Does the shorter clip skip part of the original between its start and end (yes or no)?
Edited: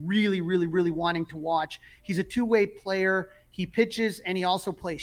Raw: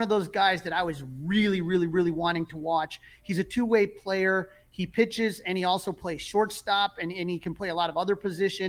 no